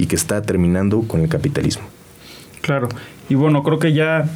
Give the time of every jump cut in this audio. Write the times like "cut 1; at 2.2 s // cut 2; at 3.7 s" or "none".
none

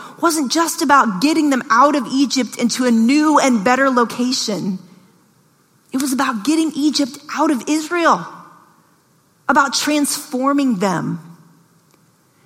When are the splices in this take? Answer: none

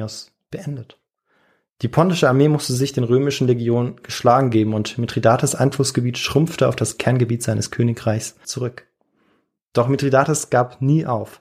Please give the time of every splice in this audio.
cut 1; at 8.4 s

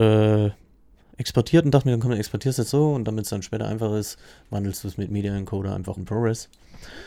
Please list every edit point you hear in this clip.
cut 1; at 1.1 s // cut 2; at 2.7 s // cut 3; at 6.0 s

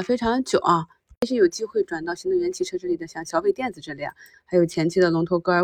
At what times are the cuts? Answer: cut 1; at 4.3 s

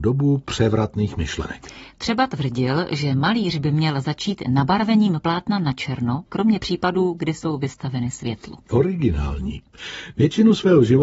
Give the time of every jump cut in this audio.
cut 1; at 6.3 s

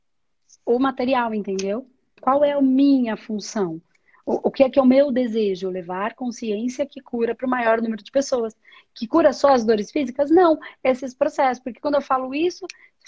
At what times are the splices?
cut 1; at 2.2 s

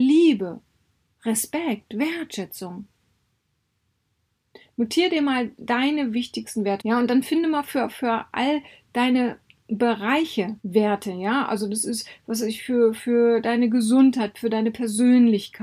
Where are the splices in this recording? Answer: cut 1; at 6.8 s // cut 2; at 10.6 s

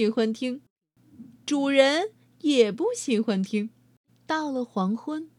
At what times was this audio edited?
cut 1; at 4.1 s

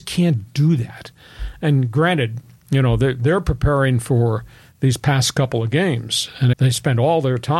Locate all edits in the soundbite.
cut 1; at 6.5 s

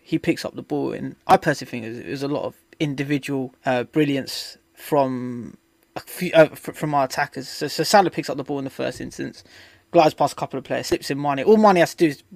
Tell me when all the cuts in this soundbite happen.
cut 1; at 3.6 s

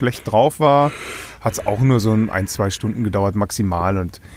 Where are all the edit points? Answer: none

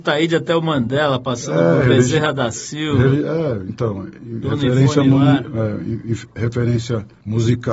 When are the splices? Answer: none

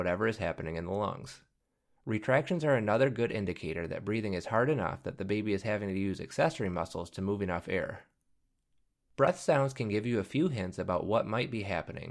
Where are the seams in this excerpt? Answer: none

